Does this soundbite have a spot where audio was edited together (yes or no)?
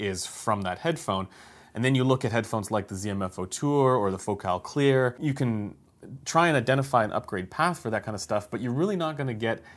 no